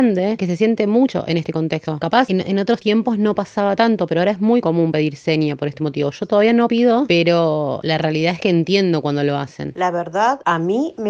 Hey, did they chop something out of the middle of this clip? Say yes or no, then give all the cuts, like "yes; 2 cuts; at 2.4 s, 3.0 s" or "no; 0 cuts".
no; 0 cuts